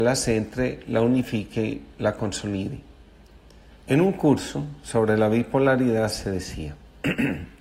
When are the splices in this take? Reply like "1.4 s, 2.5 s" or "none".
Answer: 3.7 s